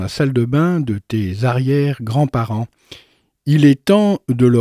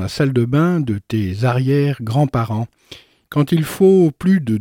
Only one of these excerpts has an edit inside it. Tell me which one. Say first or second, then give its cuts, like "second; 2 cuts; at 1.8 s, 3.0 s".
second; 1 cut; at 3.2 s